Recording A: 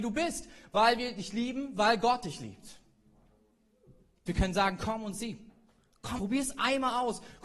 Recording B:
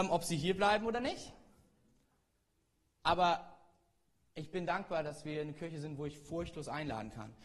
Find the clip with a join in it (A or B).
A